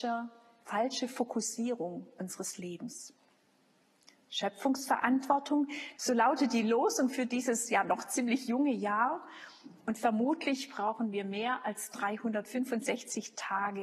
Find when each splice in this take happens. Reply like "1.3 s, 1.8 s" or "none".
6.0 s